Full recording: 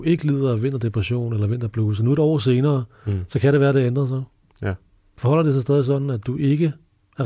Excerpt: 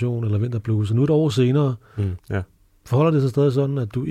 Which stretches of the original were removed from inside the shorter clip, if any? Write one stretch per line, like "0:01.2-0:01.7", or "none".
0:03.3-0:04.5